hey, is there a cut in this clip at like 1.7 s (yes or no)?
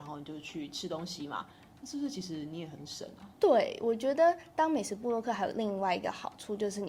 no